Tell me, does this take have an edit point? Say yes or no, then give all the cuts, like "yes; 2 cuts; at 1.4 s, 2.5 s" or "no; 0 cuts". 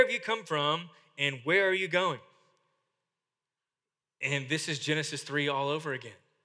no; 0 cuts